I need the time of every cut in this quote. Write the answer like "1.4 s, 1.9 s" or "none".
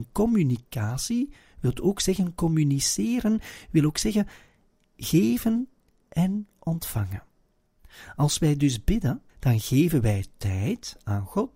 9.3 s